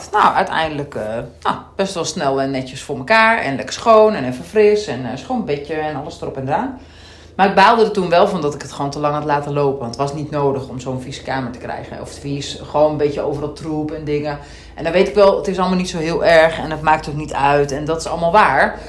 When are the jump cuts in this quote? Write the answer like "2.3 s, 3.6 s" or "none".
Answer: none